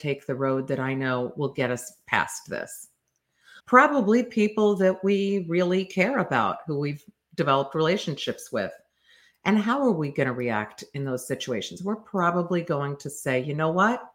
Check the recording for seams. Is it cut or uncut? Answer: cut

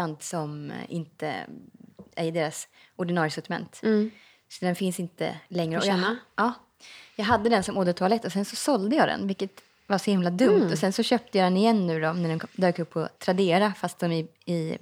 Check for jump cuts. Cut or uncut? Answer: uncut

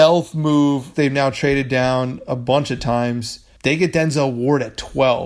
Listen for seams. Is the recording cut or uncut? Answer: cut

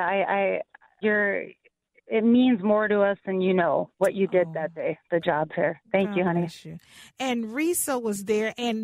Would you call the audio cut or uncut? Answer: cut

